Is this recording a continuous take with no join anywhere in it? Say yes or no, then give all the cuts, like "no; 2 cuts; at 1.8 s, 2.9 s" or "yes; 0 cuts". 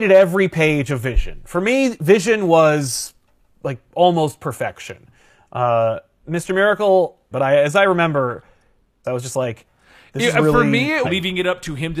no; 3 cuts; at 7.3 s, 9.0 s, 11.0 s